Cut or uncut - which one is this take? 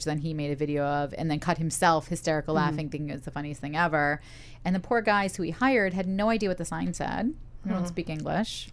uncut